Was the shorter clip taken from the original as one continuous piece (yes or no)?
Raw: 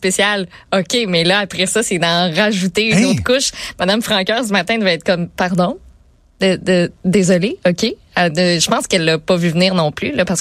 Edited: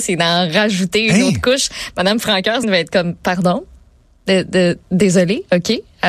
no